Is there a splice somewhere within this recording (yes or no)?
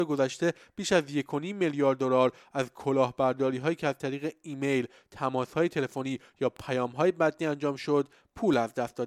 no